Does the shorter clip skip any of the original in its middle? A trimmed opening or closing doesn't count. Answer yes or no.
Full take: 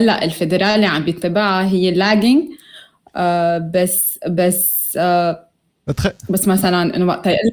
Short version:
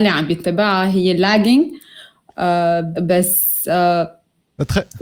yes